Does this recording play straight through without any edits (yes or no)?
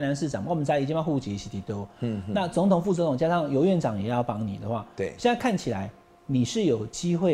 yes